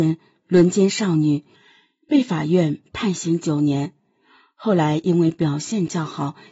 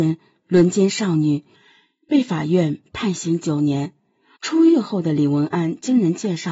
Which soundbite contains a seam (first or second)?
second